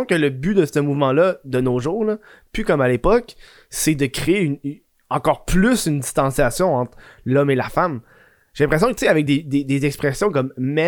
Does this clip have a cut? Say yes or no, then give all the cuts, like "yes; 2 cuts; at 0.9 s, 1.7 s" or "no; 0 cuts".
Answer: no; 0 cuts